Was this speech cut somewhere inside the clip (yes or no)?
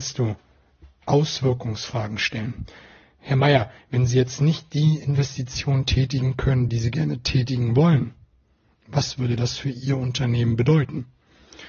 no